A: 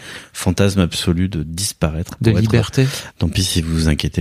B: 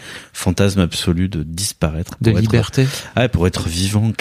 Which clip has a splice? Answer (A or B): A